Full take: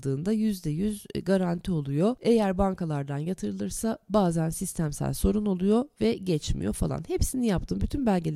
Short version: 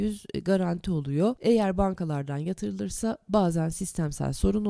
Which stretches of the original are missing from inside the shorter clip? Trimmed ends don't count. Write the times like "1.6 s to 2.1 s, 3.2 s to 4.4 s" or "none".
none